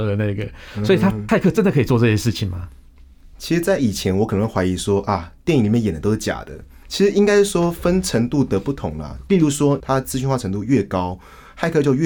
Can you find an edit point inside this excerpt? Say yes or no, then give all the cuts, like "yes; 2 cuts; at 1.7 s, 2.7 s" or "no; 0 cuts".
yes; 2 cuts; at 6.8 s, 9.8 s